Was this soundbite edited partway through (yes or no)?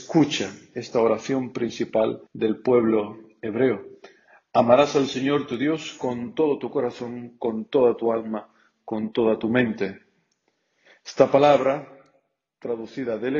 yes